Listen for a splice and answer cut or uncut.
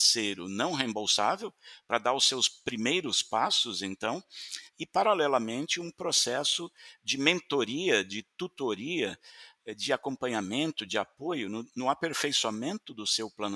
uncut